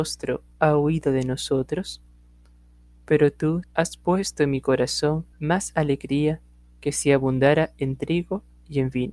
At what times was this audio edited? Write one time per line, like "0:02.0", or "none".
0:03.6
0:05.3